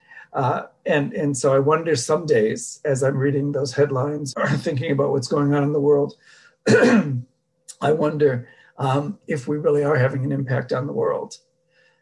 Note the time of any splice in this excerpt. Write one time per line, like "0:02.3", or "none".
0:04.3